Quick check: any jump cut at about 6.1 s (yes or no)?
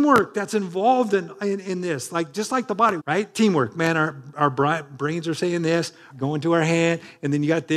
yes